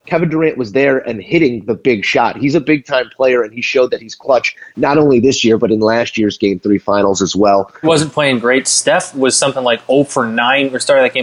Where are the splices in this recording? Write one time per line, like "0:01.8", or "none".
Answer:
0:07.8